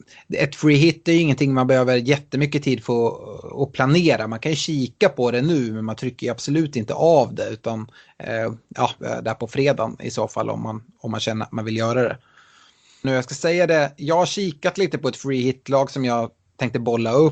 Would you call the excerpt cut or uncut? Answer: cut